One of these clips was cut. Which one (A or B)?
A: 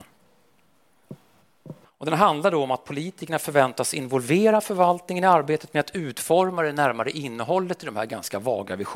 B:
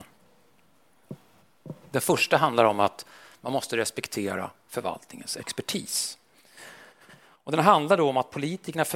A